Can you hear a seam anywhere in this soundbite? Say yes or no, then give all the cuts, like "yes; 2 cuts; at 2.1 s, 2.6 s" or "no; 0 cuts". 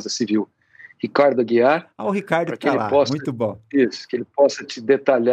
no; 0 cuts